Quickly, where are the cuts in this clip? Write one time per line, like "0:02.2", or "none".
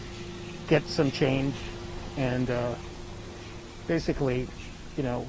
none